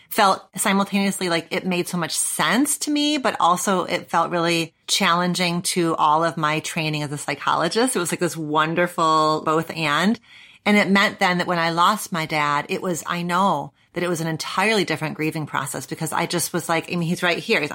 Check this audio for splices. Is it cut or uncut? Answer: cut